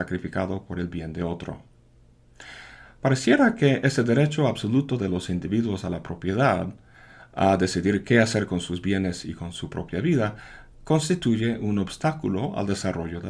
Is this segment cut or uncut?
uncut